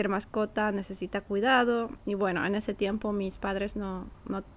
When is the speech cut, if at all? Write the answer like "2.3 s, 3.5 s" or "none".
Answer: none